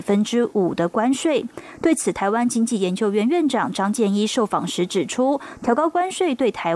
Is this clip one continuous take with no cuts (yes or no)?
yes